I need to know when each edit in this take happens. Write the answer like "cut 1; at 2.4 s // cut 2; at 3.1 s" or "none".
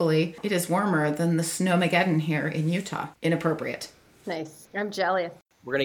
cut 1; at 3.2 s